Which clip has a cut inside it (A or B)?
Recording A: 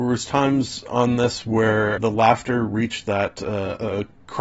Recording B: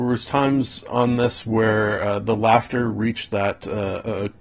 A